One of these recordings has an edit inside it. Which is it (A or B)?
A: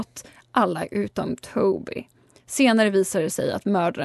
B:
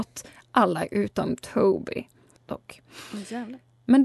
B